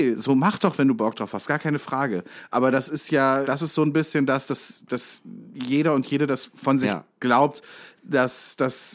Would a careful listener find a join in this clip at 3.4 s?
yes; 1 cut; at 3.4 s

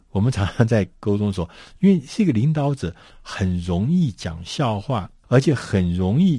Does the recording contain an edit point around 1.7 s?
no; 1 cut; at 5.2 s

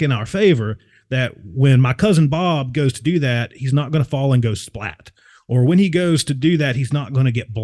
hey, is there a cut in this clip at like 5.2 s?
no; 0 cuts

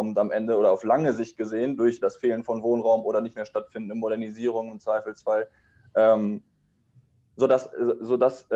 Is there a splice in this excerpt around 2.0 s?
yes; 1 cut; at 2.0 s

